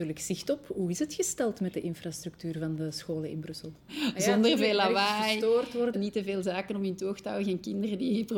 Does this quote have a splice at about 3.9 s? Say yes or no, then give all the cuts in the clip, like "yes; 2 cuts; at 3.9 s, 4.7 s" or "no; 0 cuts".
yes; 2 cuts; at 3.9 s, 5.9 s